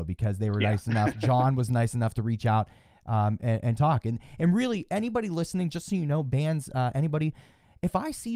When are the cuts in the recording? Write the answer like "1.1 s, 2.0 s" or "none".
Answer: none